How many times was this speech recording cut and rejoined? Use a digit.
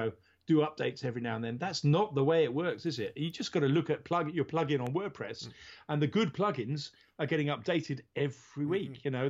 0